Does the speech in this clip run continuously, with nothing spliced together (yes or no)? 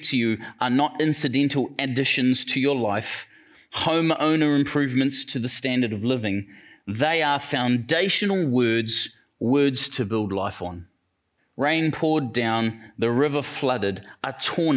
no